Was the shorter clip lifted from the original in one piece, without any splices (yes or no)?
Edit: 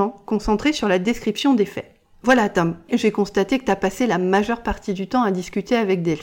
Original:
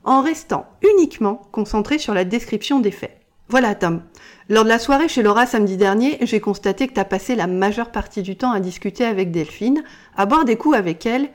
no